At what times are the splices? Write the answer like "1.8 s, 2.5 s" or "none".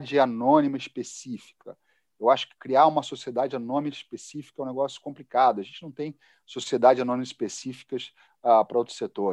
none